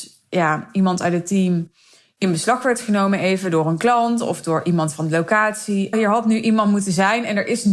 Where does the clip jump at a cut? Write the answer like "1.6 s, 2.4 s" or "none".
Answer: 5.9 s